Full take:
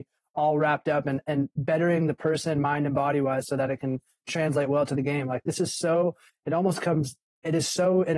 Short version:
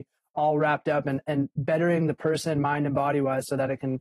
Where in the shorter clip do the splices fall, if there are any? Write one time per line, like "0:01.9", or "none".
none